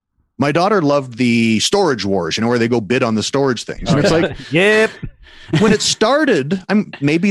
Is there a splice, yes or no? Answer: no